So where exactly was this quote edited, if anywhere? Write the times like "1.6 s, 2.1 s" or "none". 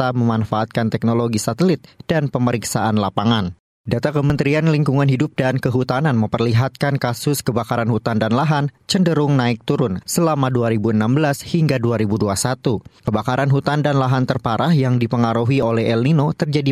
none